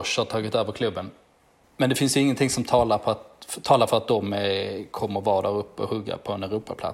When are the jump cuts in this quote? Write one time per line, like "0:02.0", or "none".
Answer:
0:01.6